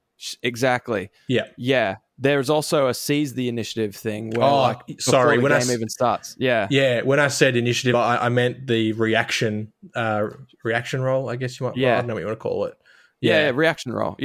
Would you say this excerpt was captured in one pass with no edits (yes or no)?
yes